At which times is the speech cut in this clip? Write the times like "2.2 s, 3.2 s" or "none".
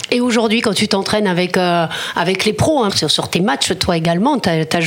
2.9 s